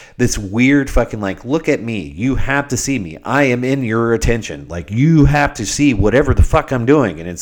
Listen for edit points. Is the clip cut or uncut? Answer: uncut